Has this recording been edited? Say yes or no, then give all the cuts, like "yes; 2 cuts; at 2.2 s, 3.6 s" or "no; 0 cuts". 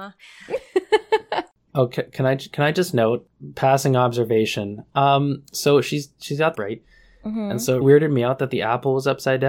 yes; 2 cuts; at 6.5 s, 7.8 s